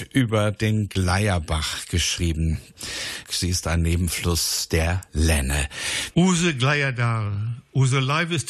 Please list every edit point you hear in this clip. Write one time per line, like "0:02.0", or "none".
0:03.2
0:06.1